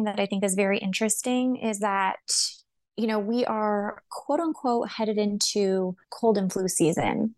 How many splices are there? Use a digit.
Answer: 1